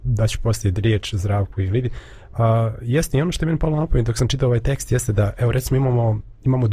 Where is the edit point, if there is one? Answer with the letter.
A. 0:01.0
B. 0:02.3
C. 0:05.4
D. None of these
D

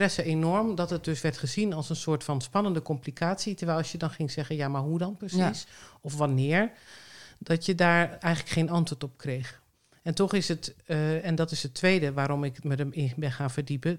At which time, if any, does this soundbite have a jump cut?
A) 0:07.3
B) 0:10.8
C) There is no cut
C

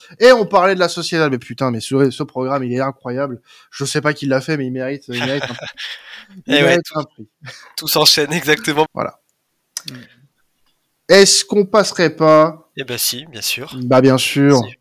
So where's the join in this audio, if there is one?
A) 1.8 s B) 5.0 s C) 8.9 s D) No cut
C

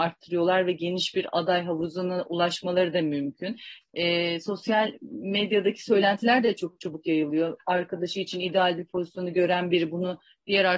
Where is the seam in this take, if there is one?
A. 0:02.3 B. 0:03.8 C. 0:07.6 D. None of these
B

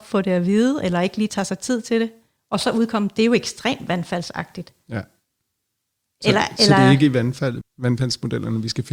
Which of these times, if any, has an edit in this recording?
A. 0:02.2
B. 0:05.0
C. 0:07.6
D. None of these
C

